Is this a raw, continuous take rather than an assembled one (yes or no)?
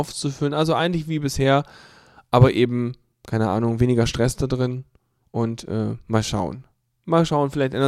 yes